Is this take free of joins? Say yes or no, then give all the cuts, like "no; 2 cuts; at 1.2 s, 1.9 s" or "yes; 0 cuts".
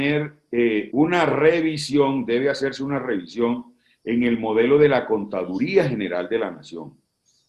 no; 1 cut; at 0.9 s